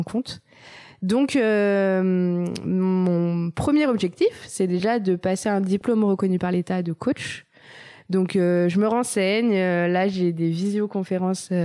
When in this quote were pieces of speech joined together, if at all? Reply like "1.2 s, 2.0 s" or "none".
none